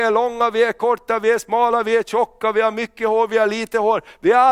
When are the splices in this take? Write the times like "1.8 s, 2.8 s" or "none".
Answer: none